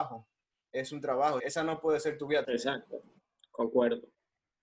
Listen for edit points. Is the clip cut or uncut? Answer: cut